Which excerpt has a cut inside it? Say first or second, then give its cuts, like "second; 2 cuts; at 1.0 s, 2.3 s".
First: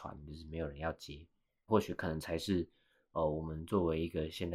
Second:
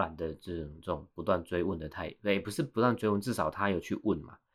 first; 1 cut; at 1.7 s